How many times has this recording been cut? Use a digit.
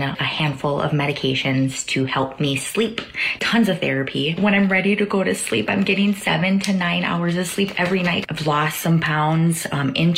1